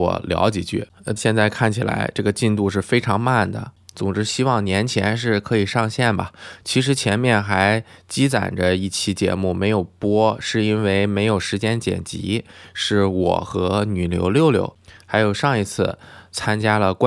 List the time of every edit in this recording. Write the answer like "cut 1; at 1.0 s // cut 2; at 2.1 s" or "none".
cut 1; at 1.2 s